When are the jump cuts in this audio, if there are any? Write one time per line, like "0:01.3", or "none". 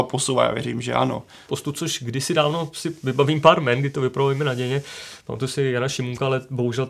0:01.5